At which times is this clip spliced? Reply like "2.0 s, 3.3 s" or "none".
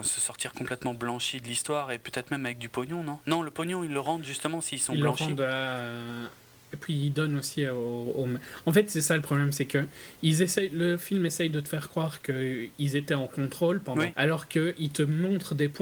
14.1 s